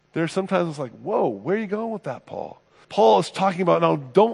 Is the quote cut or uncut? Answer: cut